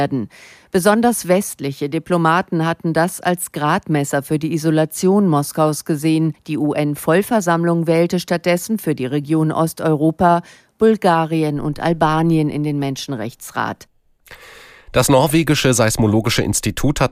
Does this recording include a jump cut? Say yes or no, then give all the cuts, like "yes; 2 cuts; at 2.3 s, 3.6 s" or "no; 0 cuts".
no; 0 cuts